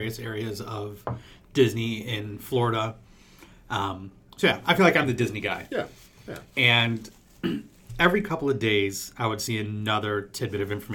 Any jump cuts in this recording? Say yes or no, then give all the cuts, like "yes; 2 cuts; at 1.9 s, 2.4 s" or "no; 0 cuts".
no; 0 cuts